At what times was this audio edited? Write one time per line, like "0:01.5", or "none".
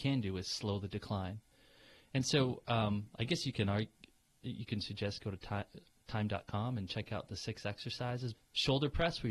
0:08.3